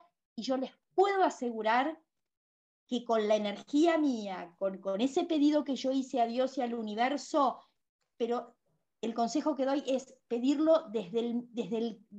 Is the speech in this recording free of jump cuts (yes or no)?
yes